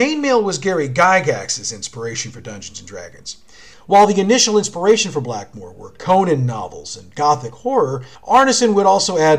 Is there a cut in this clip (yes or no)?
yes